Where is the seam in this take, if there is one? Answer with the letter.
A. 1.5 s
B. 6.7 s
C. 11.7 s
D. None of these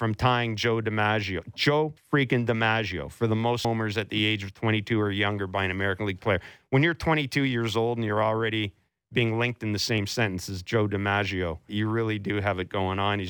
C